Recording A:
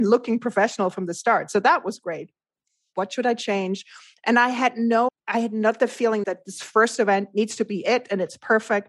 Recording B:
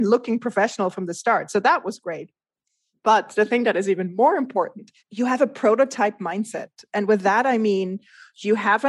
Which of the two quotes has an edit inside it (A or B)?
A